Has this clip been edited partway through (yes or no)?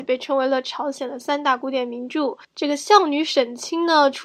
yes